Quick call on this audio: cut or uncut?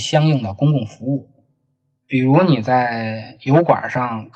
cut